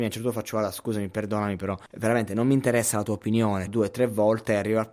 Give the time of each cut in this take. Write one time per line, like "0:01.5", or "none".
0:01.9
0:03.7